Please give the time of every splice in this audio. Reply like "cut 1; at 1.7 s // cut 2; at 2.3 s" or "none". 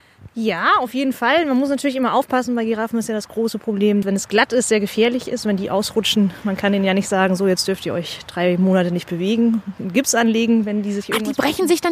cut 1; at 4.0 s